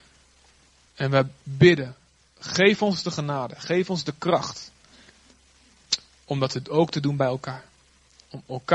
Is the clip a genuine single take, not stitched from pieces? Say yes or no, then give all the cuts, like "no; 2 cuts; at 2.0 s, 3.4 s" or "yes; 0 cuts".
yes; 0 cuts